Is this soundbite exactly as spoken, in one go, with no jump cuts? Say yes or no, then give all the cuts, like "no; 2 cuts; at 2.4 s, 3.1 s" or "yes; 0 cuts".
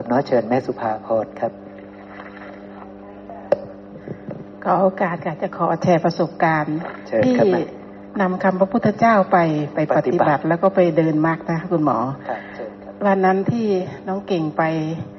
yes; 0 cuts